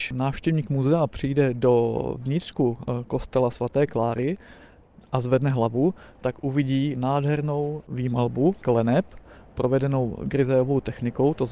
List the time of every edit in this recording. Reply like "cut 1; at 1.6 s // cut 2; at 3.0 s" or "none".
none